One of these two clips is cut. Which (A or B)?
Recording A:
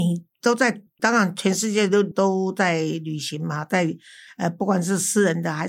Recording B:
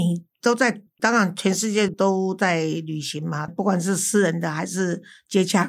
B